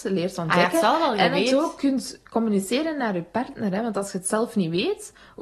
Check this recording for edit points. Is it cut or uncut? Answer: uncut